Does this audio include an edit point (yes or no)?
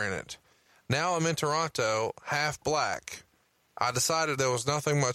no